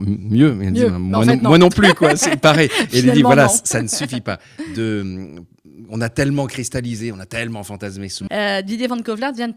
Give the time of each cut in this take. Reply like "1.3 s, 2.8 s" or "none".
8.3 s